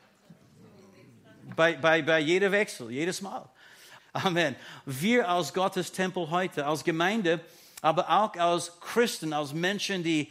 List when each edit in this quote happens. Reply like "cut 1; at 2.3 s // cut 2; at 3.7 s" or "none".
cut 1; at 4.0 s

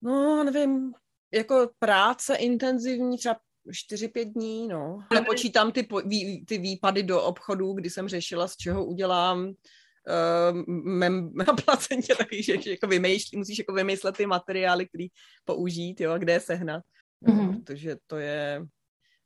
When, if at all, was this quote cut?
cut 1; at 5.1 s // cut 2; at 11.4 s // cut 3; at 17.0 s

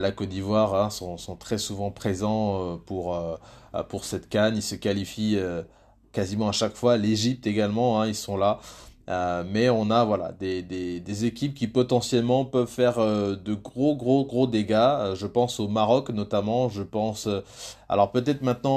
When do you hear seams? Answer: none

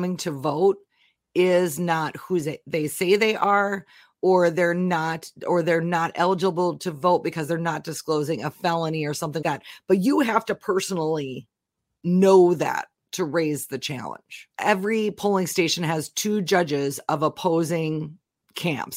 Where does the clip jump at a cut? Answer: cut 1; at 9.4 s // cut 2; at 14.5 s

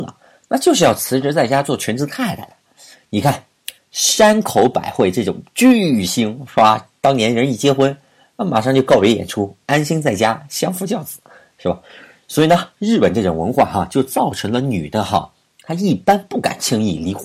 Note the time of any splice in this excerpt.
none

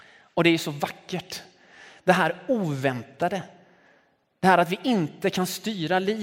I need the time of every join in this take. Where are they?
none

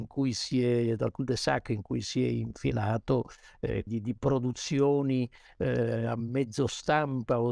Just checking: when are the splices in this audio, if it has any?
cut 1; at 3.9 s

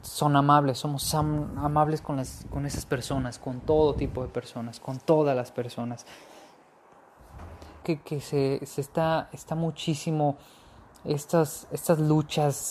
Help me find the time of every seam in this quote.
cut 1; at 7.8 s

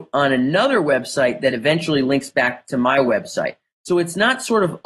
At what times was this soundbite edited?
none

